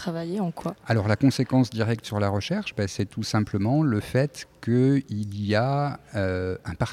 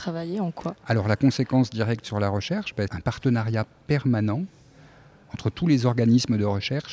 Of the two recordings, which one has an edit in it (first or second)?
second